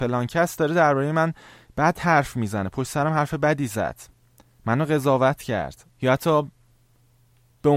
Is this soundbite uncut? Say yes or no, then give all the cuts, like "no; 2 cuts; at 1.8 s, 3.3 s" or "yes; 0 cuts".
no; 1 cut; at 5.9 s